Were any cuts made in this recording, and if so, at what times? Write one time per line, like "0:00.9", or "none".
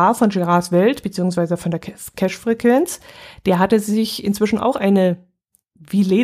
none